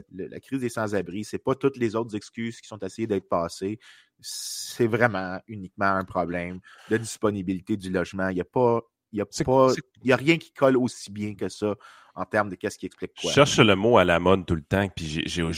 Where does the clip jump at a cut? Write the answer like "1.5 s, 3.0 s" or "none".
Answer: none